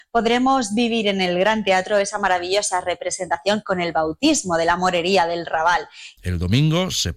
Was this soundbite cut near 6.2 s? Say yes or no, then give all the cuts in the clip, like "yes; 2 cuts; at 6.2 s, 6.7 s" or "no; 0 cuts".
yes; 1 cut; at 6.2 s